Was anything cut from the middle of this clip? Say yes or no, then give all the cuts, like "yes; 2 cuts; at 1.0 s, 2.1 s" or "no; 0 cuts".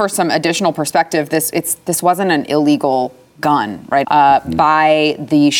yes; 1 cut; at 4.0 s